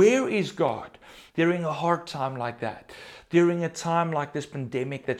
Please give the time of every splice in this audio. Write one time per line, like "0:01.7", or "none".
0:01.3

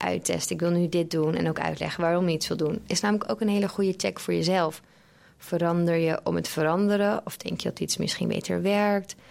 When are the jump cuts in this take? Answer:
none

